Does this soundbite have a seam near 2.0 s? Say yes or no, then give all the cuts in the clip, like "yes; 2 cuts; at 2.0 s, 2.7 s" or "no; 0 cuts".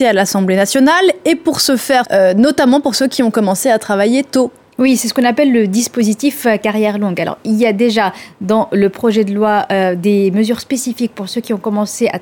yes; 1 cut; at 2.0 s